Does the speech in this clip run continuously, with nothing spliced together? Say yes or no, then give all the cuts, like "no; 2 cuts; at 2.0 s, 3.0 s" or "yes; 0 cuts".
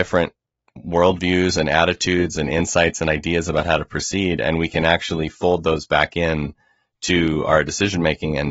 yes; 0 cuts